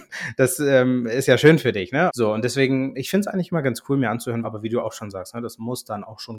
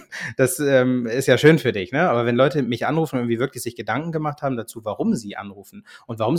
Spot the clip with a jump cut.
first; 2 cuts; at 2.1 s, 4.4 s

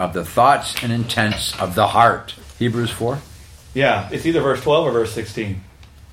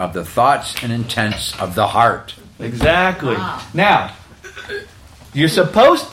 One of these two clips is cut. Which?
first; 2 cuts; at 2.4 s, 4.1 s

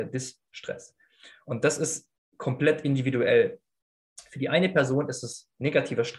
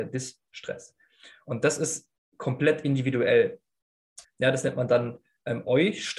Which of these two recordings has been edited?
second; 1 cut; at 4.2 s

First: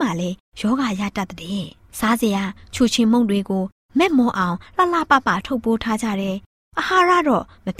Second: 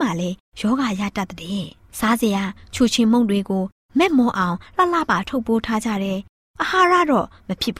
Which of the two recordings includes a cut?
second; 1 cut; at 5.1 s

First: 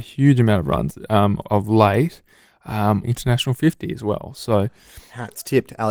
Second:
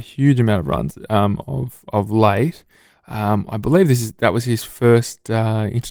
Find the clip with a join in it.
first; 2 cuts; at 1.4 s, 3.0 s

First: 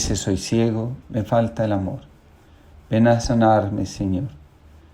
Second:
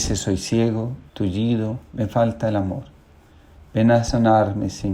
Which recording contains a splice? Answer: first; 1 cut; at 1.0 s

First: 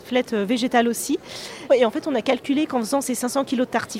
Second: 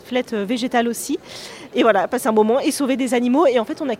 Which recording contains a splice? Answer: first; 1 cut; at 1.7 s

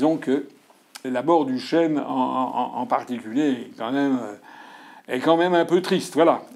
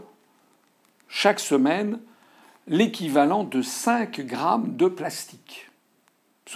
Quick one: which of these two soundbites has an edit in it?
first; 1 cut; at 1.0 s

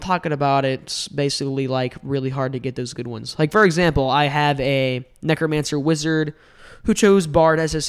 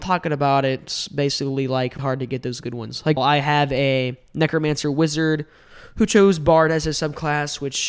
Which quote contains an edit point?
second; 2 cuts; at 2.0 s, 3.2 s

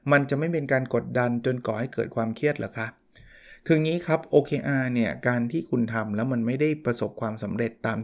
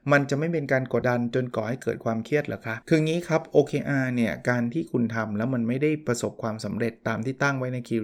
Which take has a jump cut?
second; 2 cuts; at 1.0 s, 2.8 s

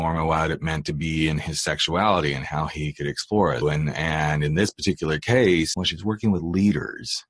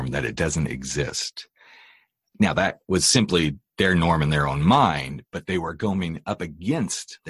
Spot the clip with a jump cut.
first; 2 cuts; at 3.6 s, 5.7 s

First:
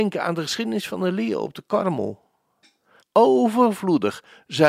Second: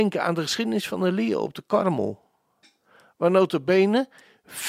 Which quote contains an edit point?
first; 1 cut; at 3.0 s

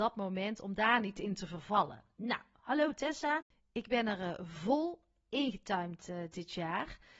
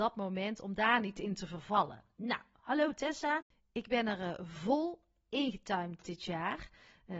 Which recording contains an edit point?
second; 1 cut; at 6.0 s

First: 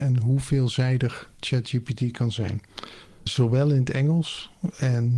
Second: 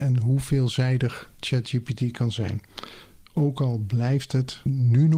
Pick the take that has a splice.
first; 1 cut; at 3.1 s

